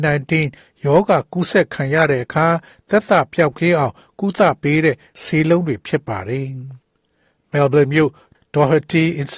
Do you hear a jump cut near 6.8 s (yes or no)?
yes